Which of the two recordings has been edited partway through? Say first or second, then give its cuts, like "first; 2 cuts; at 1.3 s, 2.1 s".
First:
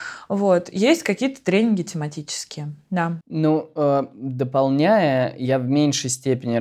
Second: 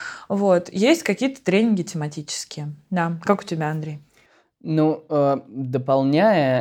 first; 1 cut; at 3.2 s